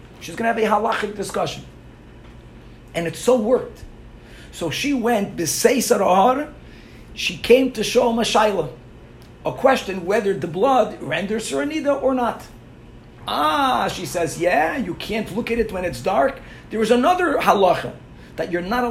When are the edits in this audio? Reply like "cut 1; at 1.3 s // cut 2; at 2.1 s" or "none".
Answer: cut 1; at 13.2 s

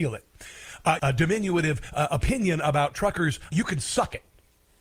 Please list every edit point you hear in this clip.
cut 1; at 1.0 s // cut 2; at 3.5 s

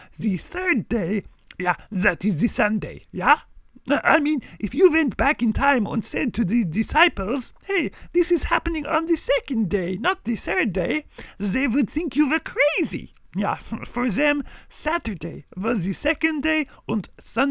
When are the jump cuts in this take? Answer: none

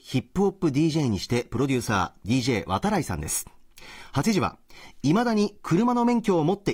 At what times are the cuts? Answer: none

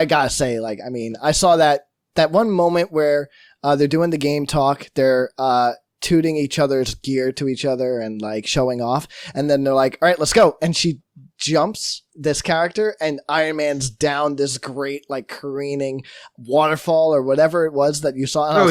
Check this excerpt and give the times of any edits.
none

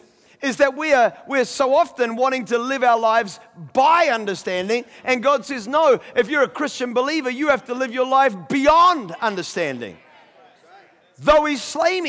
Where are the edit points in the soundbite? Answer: none

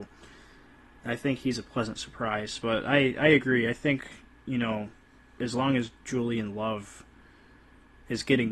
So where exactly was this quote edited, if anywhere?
none

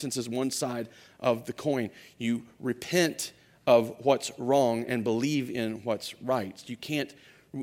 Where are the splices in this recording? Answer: none

